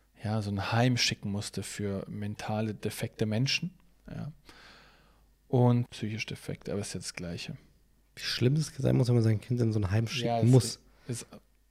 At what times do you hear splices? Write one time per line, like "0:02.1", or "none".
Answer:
0:05.9